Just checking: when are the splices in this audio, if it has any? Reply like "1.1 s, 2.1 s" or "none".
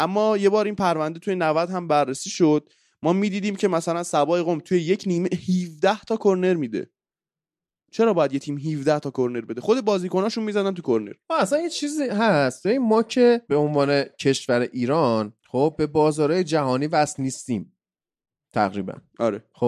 13.5 s, 15.4 s